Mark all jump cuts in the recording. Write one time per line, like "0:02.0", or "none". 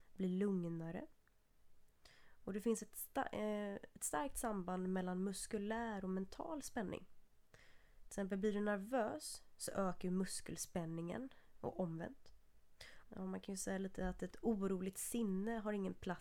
0:13.0